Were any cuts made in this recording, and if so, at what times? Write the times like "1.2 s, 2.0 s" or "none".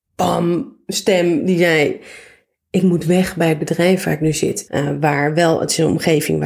4.7 s